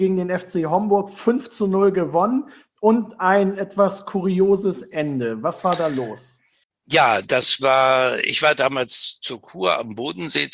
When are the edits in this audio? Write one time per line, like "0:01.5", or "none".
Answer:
none